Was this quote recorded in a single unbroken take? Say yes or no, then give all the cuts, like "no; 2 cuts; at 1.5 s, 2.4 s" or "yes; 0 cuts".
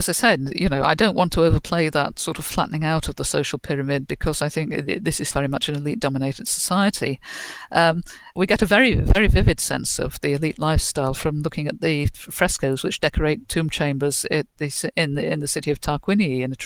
no; 2 cuts; at 5.3 s, 8.4 s